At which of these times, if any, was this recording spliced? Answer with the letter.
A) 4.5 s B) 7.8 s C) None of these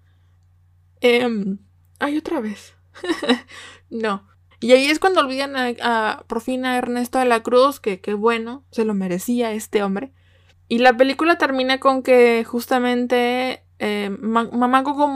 A